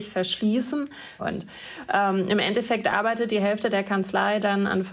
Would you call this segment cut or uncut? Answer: cut